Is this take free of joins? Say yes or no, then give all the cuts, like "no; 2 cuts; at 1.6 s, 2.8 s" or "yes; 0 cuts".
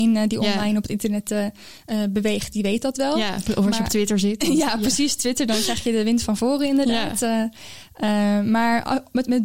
yes; 0 cuts